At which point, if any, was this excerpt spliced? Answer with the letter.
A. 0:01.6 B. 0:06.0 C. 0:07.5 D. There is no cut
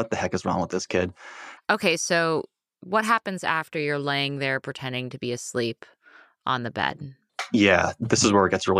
A